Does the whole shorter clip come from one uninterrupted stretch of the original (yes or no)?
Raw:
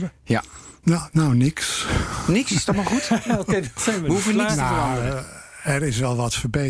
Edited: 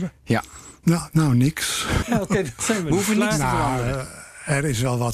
no